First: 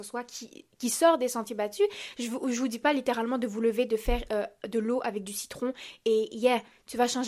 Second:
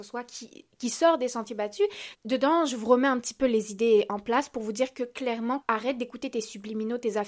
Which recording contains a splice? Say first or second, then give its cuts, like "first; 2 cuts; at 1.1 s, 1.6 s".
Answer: second; 2 cuts; at 2.1 s, 5.6 s